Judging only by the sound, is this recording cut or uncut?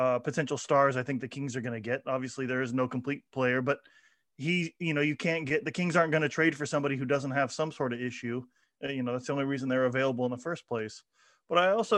uncut